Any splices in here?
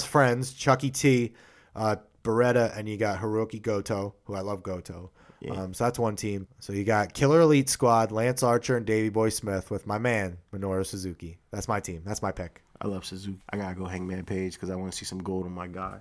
yes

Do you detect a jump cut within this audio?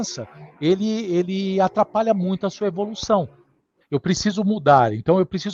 yes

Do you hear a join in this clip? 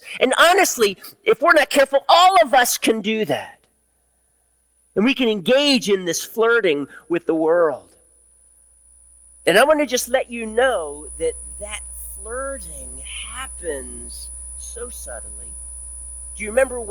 no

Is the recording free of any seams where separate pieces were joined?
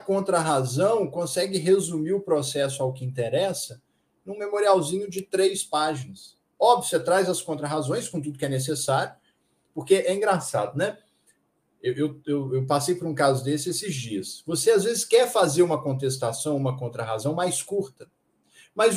yes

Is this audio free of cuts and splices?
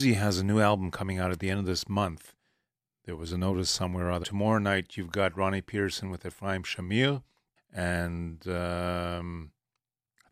no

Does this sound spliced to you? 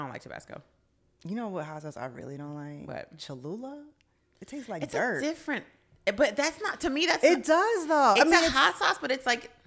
no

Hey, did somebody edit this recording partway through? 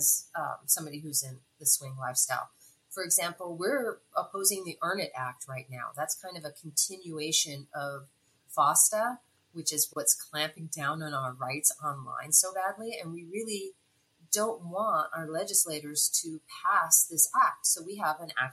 no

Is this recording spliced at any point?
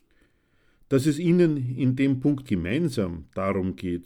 yes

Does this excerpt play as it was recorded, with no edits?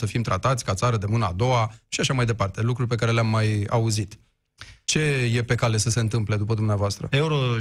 yes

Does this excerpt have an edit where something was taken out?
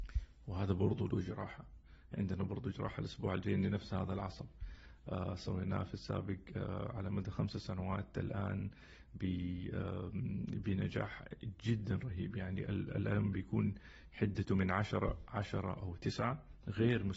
no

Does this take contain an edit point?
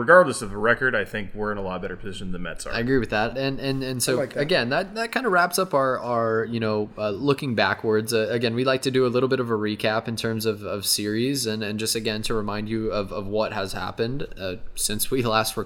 yes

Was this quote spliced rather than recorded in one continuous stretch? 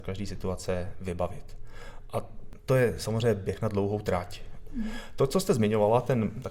yes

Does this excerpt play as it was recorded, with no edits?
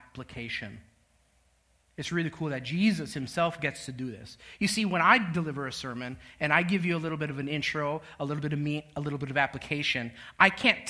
yes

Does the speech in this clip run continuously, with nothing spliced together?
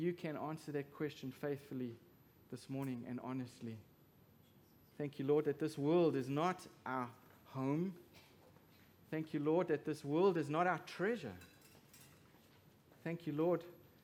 no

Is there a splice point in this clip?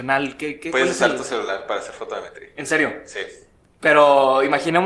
no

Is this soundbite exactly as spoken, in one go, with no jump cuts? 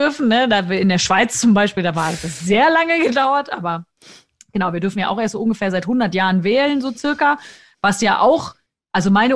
yes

